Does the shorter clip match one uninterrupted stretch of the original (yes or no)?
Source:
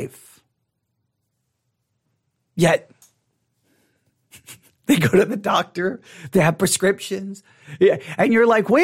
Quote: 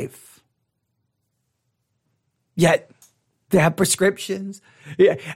no